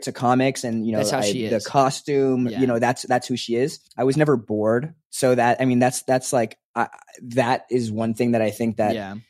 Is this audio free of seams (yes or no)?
no